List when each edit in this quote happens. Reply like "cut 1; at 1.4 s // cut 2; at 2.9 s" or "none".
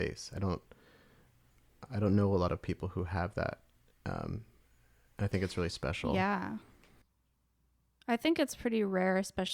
none